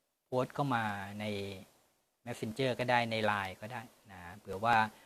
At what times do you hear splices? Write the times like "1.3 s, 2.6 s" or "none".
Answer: none